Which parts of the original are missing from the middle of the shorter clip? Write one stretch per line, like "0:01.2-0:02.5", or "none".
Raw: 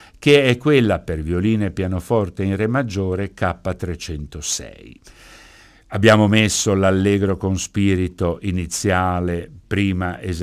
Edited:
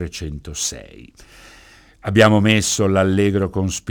none